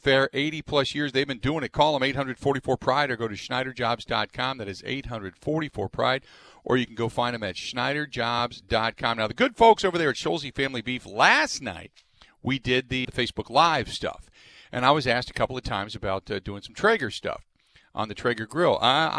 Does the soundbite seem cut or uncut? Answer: cut